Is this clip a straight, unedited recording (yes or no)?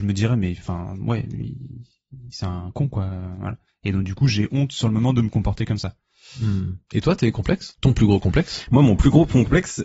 yes